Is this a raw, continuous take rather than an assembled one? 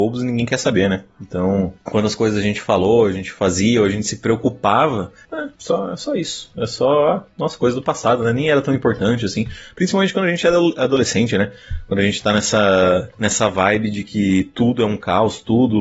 no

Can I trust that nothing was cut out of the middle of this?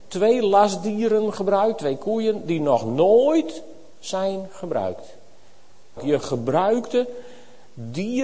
no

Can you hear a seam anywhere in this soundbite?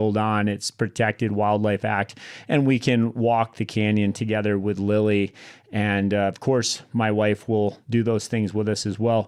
no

